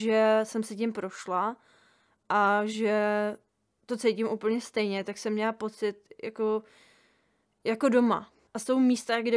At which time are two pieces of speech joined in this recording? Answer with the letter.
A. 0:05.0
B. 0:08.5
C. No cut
B